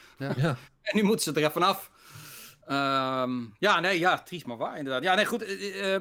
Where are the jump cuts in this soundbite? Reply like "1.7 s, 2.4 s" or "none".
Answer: none